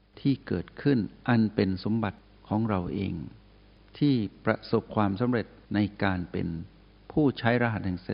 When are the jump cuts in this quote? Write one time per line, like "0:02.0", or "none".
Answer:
0:05.6